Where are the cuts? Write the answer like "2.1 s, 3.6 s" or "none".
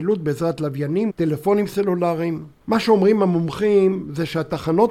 1.1 s, 2.6 s